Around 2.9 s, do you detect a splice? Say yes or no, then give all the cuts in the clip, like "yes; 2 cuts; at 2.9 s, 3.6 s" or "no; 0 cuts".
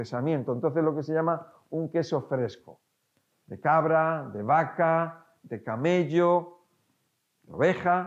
no; 0 cuts